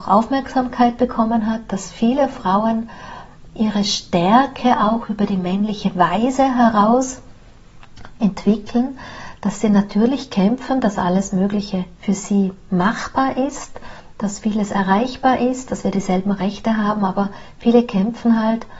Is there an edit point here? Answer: yes; 1 cut; at 11.9 s

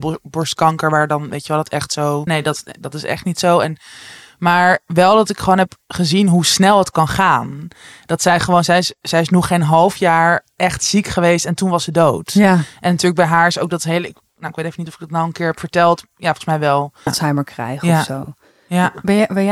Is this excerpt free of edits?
no; 2 cuts; at 2.3 s, 17.1 s

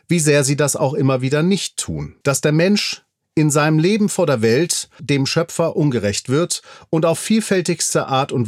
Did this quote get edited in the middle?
yes; 2 cuts; at 2.2 s, 5.0 s

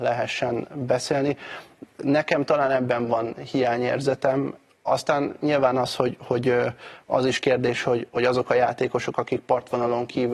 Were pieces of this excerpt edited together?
no; 0 cuts

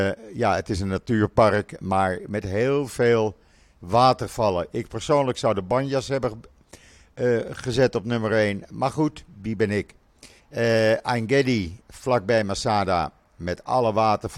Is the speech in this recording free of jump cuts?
no; 1 cut; at 10.4 s

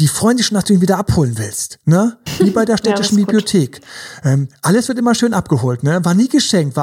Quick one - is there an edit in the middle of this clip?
no; 0 cuts

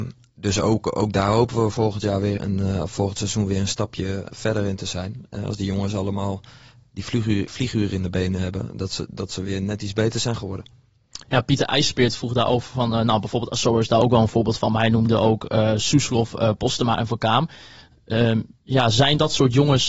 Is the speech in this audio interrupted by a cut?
yes; 1 cut; at 2.4 s

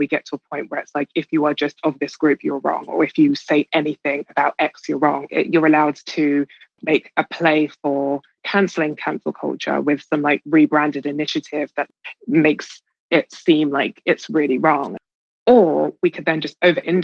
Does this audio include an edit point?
yes; 1 cut; at 5.3 s

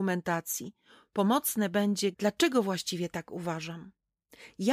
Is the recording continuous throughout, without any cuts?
no; 1 cut; at 2.1 s

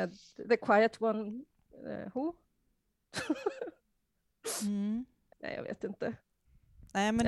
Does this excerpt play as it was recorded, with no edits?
no; 1 cut; at 5.3 s

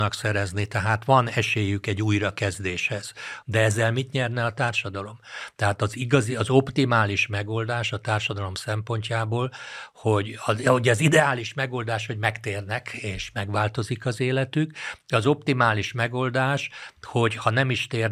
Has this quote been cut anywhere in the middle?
yes; 1 cut; at 3.4 s

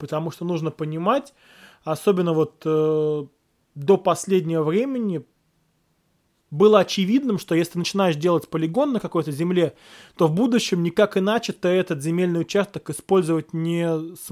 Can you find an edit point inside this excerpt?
no; 0 cuts

